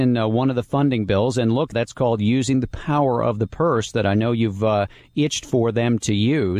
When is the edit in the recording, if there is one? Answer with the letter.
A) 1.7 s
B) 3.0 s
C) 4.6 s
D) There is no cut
A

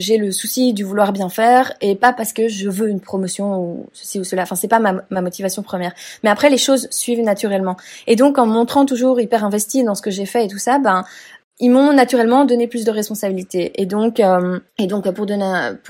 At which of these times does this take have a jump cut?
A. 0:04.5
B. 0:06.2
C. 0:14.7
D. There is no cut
C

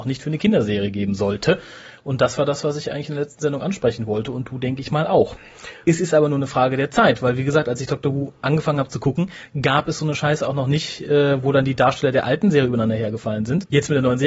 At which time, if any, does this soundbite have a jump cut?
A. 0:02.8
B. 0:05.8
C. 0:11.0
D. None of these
B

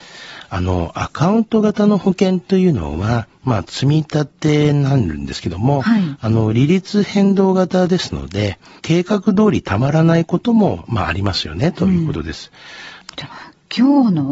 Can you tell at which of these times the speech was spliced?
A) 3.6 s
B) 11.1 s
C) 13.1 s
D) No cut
C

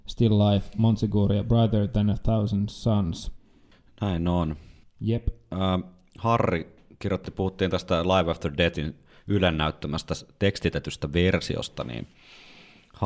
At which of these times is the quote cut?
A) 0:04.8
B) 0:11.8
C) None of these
A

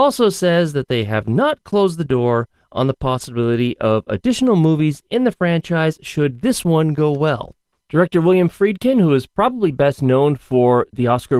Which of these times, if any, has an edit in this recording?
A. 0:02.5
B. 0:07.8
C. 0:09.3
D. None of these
B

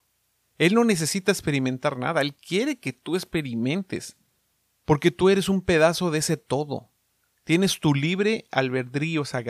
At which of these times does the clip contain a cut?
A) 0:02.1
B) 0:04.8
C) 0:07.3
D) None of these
D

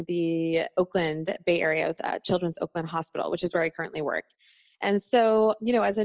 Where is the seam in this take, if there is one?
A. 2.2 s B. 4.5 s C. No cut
C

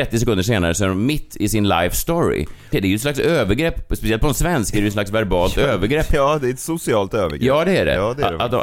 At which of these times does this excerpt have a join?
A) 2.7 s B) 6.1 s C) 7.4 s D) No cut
A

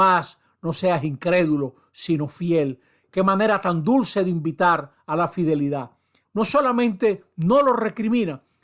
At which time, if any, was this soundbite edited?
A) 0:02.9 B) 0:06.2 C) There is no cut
B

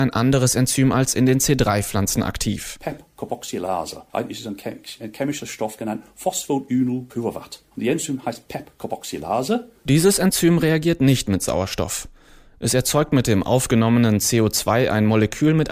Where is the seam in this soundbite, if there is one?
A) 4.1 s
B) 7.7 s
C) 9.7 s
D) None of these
A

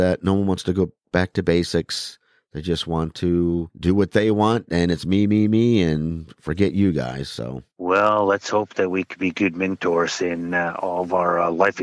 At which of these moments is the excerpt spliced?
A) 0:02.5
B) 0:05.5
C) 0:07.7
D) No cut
D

